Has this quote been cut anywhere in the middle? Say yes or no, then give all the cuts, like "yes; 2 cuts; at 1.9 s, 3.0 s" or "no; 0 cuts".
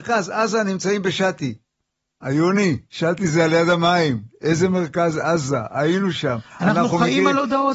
no; 0 cuts